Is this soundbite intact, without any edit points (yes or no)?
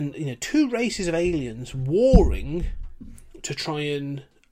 yes